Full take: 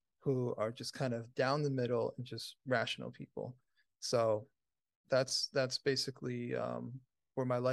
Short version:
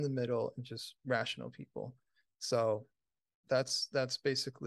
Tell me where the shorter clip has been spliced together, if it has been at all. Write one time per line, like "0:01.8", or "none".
none